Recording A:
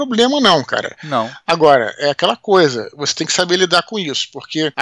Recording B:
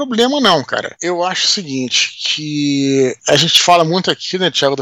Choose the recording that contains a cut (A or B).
B